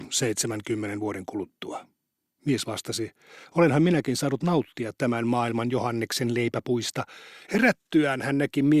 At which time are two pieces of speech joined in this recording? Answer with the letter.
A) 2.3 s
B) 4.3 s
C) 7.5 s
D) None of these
C